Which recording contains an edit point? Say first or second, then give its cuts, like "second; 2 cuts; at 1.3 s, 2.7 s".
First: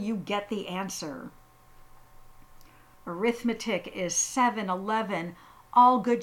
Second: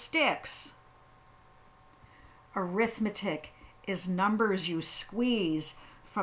first; 1 cut; at 2.9 s